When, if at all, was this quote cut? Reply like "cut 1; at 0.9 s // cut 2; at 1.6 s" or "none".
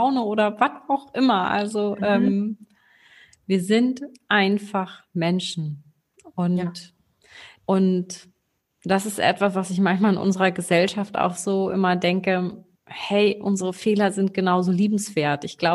cut 1; at 7.6 s